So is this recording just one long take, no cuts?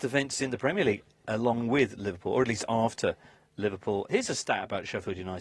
yes; 0 cuts

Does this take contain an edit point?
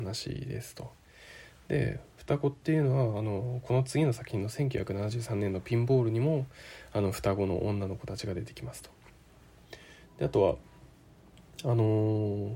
no; 0 cuts

